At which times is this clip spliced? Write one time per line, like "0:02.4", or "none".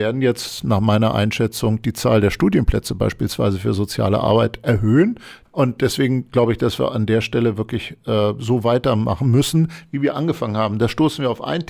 0:05.5